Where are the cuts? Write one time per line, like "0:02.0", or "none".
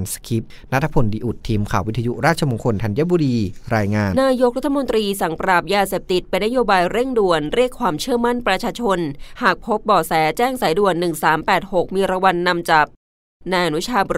0:04.1